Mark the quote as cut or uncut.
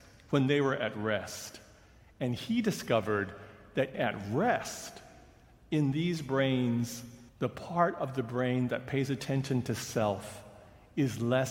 cut